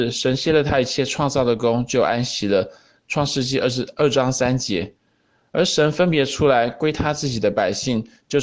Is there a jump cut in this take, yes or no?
no